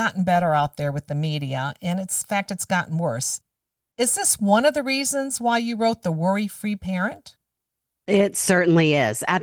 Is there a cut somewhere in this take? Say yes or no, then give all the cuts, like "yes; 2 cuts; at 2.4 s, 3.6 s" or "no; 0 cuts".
no; 0 cuts